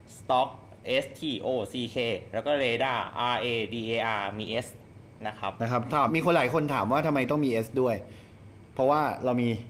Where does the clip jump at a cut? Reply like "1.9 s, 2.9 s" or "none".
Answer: 6.1 s